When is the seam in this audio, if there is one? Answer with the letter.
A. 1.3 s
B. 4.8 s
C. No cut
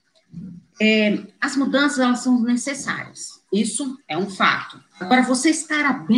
C